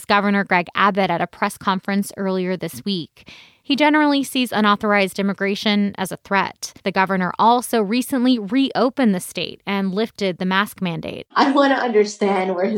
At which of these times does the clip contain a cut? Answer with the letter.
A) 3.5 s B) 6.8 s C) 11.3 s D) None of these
B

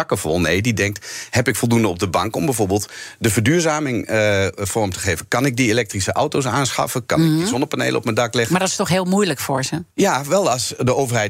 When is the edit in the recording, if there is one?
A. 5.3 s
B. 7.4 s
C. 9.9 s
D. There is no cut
C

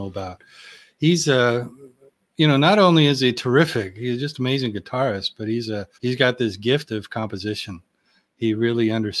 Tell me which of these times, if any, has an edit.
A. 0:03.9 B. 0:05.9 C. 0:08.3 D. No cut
B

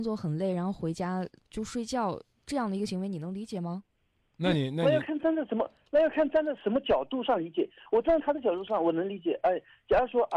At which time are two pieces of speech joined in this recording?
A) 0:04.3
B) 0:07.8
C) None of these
A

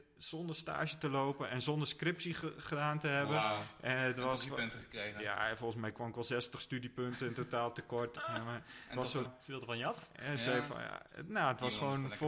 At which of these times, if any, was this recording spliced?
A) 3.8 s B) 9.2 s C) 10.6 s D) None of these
B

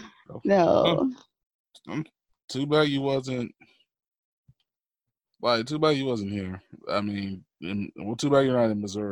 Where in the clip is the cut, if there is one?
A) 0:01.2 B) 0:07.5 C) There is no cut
C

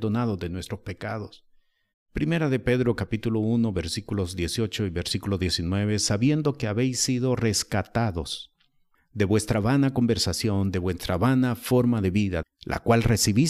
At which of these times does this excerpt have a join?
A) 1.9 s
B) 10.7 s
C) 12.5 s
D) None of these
A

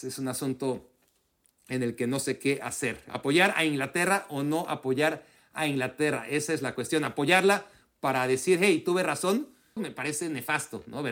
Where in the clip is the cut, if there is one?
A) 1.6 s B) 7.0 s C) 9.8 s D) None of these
C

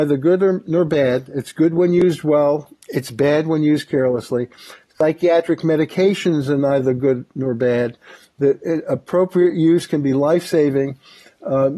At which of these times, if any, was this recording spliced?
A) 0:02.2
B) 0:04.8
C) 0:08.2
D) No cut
D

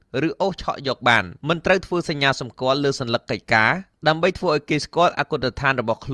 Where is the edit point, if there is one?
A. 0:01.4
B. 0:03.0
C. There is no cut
A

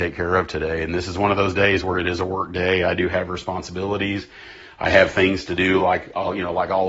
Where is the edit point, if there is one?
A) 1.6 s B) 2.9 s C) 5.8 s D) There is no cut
D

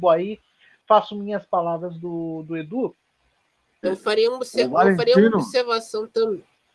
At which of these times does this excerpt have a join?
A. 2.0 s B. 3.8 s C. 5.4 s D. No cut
B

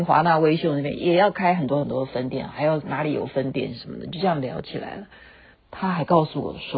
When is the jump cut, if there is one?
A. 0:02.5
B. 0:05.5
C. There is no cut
B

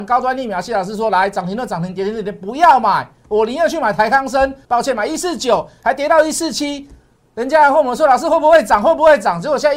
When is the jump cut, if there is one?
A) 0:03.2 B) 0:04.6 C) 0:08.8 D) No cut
B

